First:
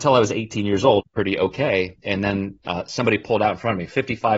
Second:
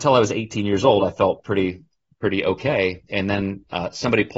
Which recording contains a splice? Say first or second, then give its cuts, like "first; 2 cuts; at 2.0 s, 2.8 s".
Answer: first; 1 cut; at 1.0 s